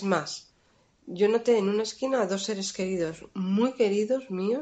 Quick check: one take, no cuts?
yes; 0 cuts

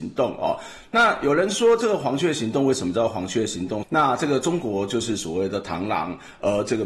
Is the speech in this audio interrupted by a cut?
yes; 1 cut; at 3.8 s

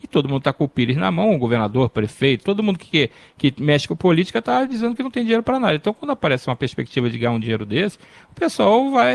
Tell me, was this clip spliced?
yes; 1 cut; at 2.4 s

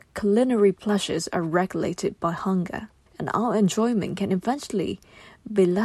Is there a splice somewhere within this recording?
yes; 1 cut; at 3.1 s

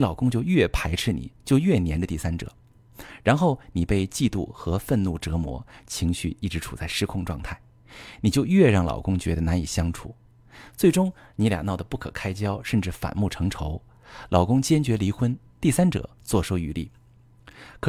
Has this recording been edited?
no; 0 cuts

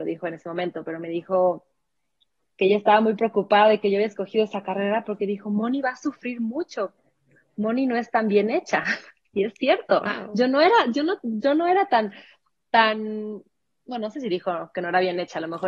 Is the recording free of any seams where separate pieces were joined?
yes; 0 cuts

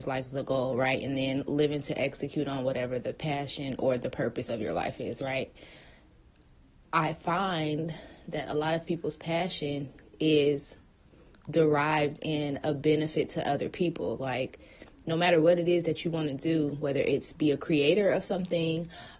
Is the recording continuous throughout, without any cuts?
yes; 0 cuts

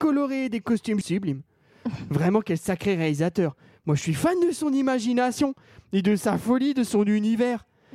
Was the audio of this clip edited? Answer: yes; 1 cut; at 1.0 s

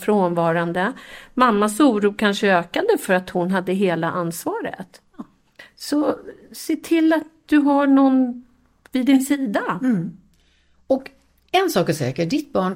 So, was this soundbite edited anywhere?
no; 0 cuts

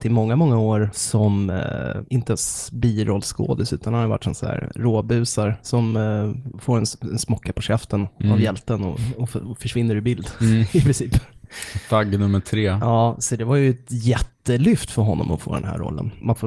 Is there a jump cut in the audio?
no; 0 cuts

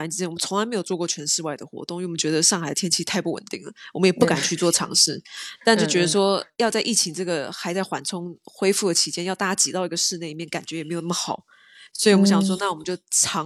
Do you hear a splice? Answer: no; 0 cuts

